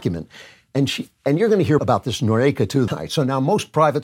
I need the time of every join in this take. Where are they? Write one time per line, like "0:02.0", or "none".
0:01.8
0:02.9